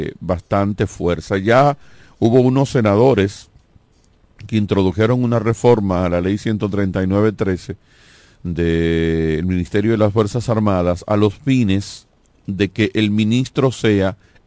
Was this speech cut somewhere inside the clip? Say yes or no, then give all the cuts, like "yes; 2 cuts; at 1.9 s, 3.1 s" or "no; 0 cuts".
no; 0 cuts